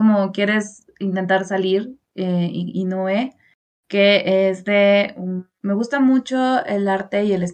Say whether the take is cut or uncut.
cut